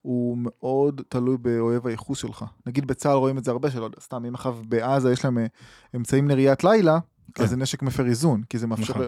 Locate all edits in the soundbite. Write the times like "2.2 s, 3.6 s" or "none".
none